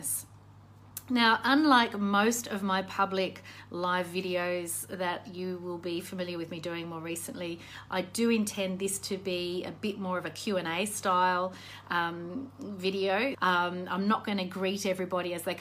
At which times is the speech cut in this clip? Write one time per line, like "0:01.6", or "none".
0:13.3